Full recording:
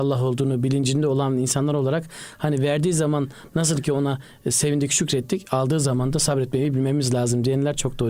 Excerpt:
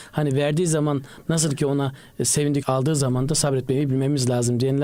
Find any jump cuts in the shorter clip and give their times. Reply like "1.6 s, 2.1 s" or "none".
2.6 s